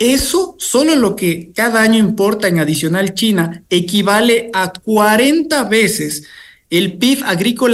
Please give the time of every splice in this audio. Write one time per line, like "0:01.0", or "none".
none